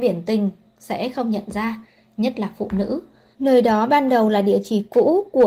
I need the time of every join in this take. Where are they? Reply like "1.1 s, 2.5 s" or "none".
3.3 s